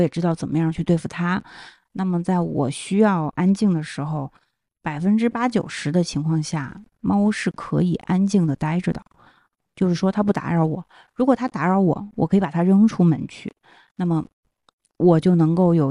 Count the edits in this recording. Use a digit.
0